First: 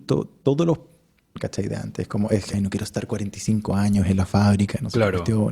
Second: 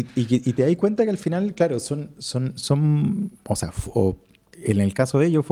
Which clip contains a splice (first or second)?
first